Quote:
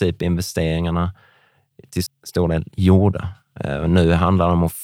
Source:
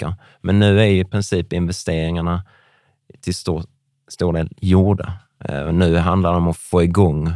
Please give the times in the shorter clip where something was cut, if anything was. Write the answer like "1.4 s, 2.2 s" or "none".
2.1 s

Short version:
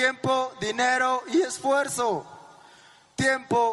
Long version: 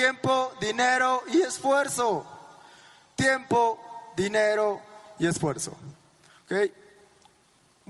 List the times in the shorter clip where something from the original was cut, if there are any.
none

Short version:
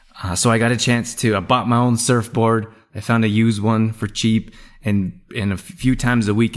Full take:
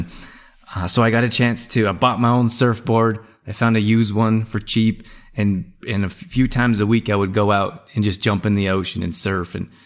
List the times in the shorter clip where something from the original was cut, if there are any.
none

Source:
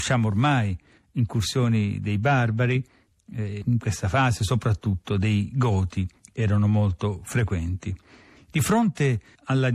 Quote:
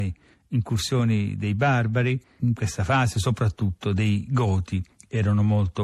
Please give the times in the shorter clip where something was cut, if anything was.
2.4 s

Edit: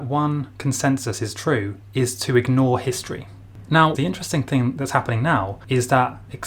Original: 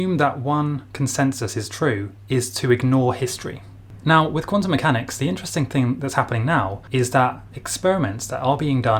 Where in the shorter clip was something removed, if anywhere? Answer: 3.9 s

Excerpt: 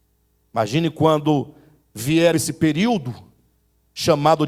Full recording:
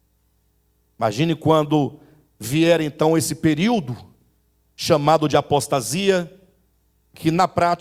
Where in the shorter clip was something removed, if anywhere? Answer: 2.3 s

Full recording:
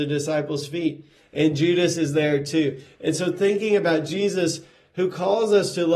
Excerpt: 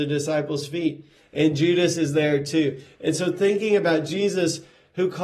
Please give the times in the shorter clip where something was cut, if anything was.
none

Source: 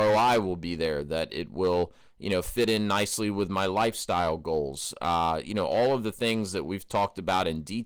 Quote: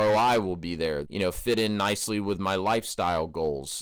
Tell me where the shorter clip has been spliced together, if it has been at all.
1.0 s

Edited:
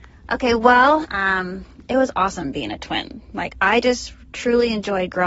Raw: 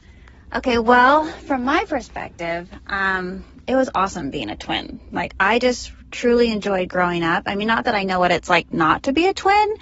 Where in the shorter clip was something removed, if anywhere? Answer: 1.0 s

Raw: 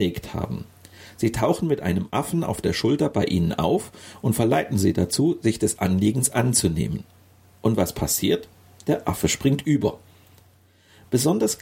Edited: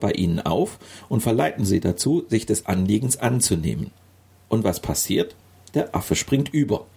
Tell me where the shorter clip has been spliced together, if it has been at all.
none

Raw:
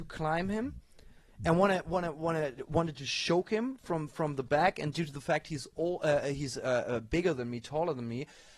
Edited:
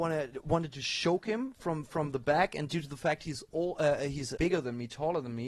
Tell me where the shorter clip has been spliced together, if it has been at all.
4.4 s

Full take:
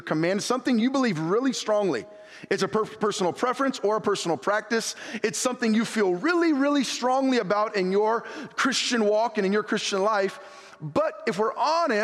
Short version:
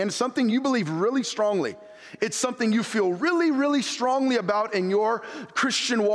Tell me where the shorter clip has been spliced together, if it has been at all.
2.2 s

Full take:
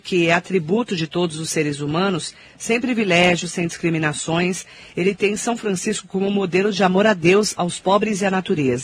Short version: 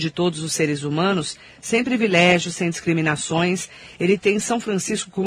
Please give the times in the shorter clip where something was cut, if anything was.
none

